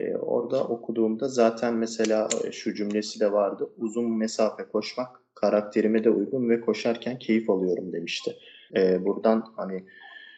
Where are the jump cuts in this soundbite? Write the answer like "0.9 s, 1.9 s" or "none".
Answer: 8.7 s